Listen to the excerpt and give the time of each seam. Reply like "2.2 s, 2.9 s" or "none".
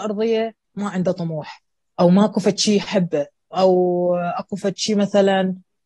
3.5 s